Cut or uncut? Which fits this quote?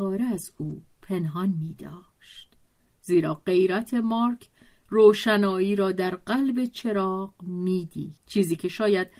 cut